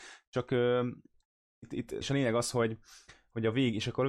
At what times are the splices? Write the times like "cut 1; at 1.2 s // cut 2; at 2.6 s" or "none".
cut 1; at 2.0 s